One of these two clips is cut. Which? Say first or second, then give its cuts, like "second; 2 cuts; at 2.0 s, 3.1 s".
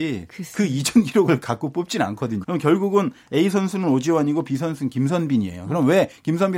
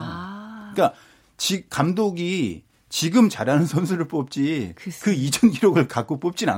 first; 1 cut; at 2.4 s